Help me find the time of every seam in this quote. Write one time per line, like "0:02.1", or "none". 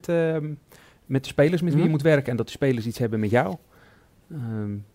none